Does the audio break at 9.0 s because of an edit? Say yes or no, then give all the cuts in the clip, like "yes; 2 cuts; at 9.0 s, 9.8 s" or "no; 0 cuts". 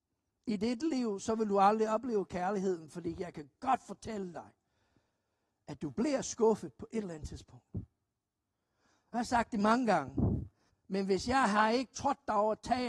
no; 1 cut; at 10.7 s